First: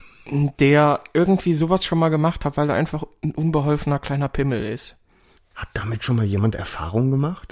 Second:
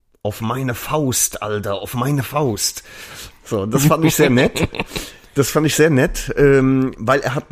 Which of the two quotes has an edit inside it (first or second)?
first